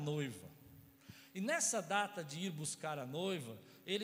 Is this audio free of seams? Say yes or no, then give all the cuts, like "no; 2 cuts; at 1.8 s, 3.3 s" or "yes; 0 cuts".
yes; 0 cuts